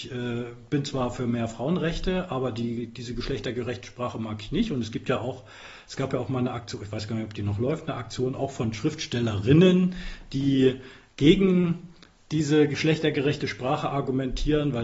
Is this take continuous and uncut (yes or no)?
yes